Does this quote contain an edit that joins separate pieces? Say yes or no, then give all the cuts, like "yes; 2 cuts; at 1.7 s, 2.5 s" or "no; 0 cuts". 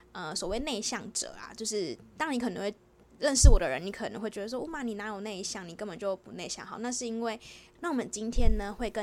yes; 1 cut; at 7.8 s